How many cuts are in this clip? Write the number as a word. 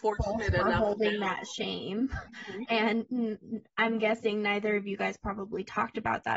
zero